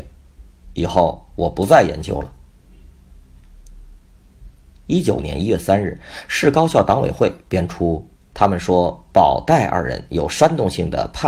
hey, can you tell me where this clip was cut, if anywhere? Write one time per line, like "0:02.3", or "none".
0:05.2
0:08.2